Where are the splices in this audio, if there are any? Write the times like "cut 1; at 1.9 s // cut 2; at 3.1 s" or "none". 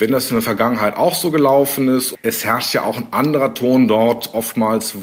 none